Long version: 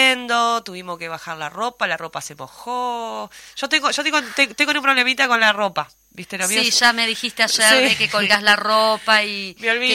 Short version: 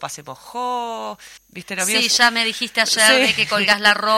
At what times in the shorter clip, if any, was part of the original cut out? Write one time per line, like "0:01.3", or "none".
0:01.4